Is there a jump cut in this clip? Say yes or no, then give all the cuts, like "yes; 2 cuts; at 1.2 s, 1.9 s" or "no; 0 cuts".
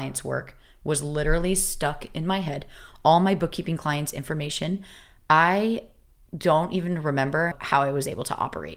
no; 0 cuts